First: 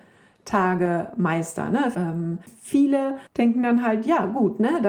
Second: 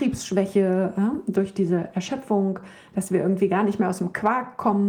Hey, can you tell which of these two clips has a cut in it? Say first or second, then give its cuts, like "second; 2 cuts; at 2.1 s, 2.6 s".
first; 1 cut; at 1.9 s